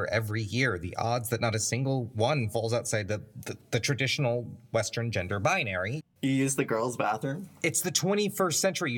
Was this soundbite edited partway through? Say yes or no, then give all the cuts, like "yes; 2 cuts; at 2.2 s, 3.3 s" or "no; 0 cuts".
yes; 1 cut; at 6.0 s